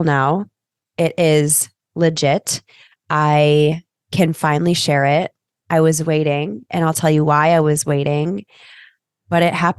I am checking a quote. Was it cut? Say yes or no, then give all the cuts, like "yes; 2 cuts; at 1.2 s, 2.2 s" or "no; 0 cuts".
no; 0 cuts